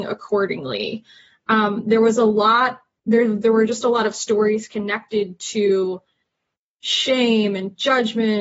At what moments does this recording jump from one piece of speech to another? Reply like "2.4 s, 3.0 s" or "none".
none